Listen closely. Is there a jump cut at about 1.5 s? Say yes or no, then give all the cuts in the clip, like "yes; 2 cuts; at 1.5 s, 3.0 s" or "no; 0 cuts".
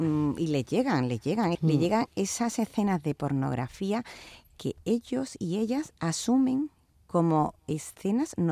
yes; 1 cut; at 1.5 s